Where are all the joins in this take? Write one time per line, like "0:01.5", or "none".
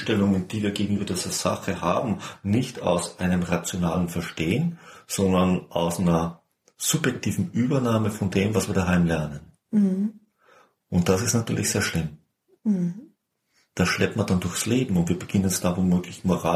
none